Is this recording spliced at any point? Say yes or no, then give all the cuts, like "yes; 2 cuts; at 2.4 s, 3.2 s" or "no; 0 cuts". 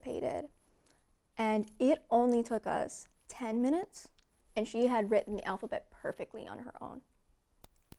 no; 0 cuts